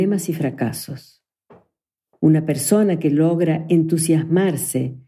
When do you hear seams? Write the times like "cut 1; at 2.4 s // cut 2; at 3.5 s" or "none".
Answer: cut 1; at 2.1 s